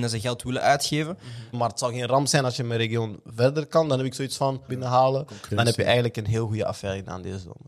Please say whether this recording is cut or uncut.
cut